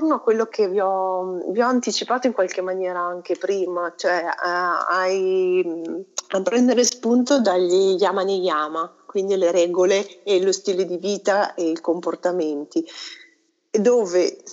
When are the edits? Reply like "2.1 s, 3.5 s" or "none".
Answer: none